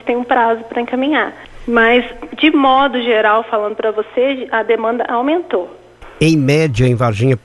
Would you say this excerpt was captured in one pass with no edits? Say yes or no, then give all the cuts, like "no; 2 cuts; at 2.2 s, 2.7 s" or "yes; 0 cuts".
yes; 0 cuts